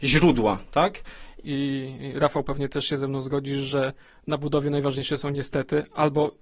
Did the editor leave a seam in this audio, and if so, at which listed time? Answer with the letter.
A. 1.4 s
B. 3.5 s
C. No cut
A